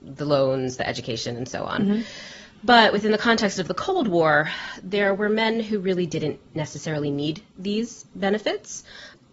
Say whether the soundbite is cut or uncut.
uncut